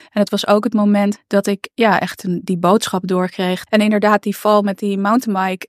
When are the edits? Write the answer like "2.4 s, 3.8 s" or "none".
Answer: 1.1 s, 3.7 s